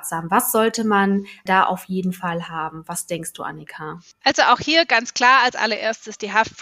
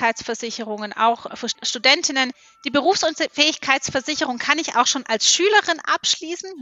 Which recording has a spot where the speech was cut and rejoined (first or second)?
second